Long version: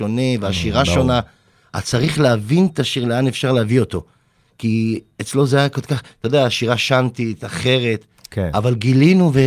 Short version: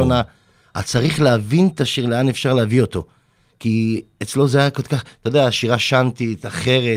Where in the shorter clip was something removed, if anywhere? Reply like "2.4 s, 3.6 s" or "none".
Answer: none